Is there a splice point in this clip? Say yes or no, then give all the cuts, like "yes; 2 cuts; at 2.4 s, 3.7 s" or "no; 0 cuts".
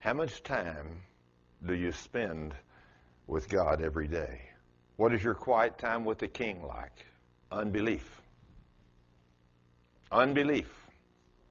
yes; 1 cut; at 7.4 s